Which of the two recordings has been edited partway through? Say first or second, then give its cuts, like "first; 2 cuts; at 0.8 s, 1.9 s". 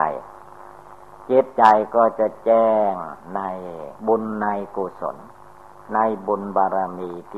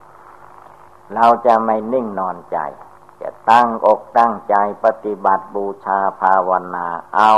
first; 1 cut; at 4.0 s